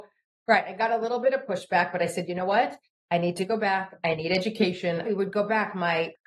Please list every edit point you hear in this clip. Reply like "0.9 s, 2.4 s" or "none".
5.0 s